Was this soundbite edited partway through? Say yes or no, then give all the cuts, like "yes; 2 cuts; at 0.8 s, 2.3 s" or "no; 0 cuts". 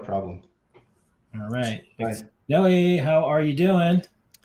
yes; 1 cut; at 2.3 s